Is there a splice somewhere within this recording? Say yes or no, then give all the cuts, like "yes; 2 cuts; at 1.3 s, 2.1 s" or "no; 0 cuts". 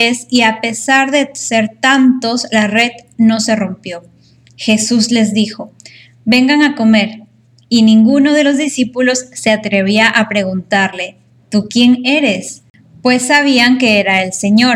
no; 0 cuts